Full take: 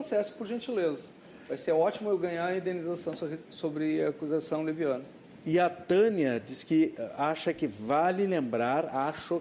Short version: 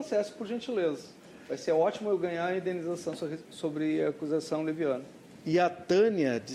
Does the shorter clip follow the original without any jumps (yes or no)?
yes